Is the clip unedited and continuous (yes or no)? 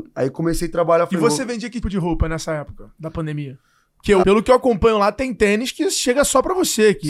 no